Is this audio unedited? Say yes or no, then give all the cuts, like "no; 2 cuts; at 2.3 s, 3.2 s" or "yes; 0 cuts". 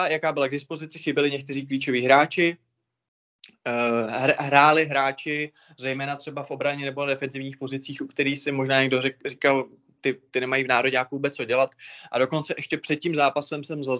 yes; 0 cuts